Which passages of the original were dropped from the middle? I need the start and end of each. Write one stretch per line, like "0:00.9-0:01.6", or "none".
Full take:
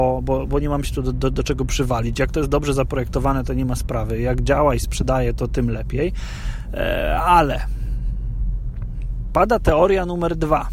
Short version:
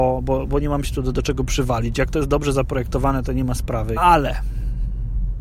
0:01.1-0:01.3
0:04.2-0:07.2